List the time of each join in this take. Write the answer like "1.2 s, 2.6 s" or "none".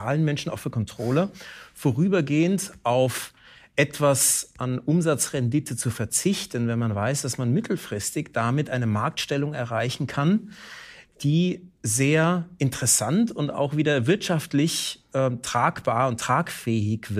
none